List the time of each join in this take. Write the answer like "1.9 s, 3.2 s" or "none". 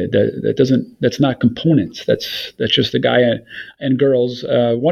none